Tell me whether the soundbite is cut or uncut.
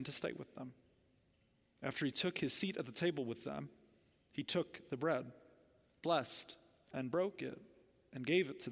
uncut